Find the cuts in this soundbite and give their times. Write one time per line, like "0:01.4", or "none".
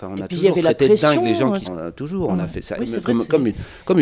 0:01.6
0:02.8